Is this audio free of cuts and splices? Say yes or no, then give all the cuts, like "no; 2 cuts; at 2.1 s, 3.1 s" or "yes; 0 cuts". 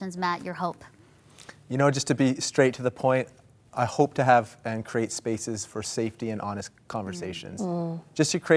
yes; 0 cuts